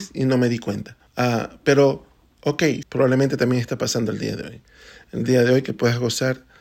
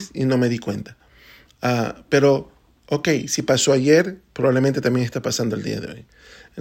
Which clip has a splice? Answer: first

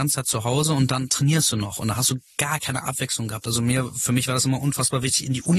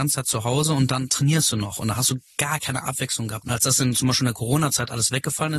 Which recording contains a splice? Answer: second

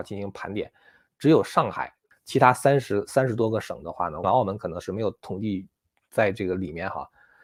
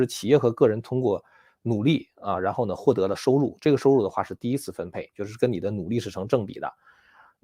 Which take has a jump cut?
first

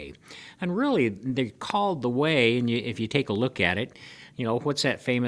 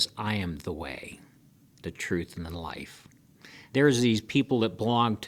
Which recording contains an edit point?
second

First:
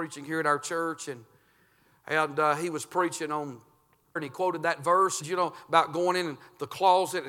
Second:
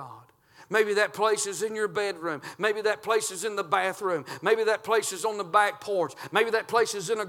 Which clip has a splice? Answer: first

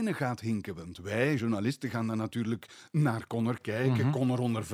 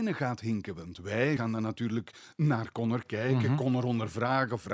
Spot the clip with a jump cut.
second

